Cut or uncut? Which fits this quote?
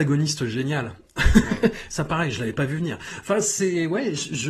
uncut